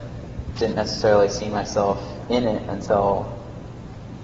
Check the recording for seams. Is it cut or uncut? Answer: uncut